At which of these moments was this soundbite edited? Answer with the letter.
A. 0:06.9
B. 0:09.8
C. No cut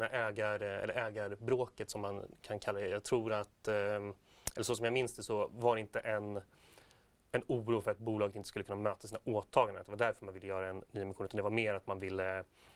C